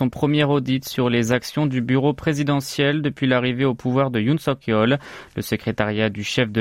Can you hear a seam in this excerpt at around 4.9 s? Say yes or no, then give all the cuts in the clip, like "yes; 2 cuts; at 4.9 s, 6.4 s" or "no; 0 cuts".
no; 0 cuts